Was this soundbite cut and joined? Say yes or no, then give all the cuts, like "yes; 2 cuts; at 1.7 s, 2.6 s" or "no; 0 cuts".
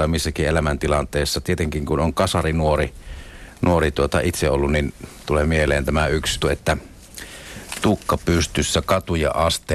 yes; 1 cut; at 6.4 s